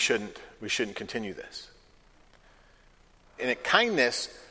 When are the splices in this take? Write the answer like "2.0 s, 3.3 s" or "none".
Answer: 3.4 s